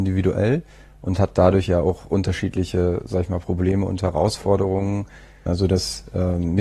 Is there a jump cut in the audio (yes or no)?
yes